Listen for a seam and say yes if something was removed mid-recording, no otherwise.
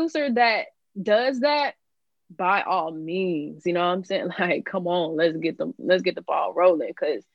no